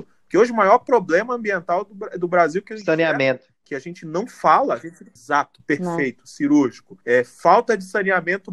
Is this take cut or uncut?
cut